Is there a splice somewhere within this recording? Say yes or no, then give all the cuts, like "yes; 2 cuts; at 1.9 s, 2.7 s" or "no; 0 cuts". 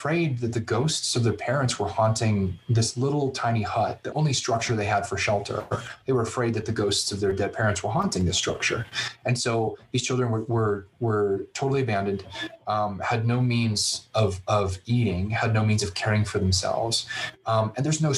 yes; 1 cut; at 4.1 s